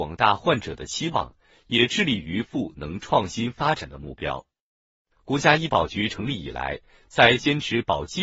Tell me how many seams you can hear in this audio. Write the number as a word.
zero